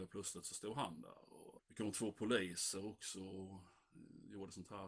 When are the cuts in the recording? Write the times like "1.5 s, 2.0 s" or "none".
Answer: 1.6 s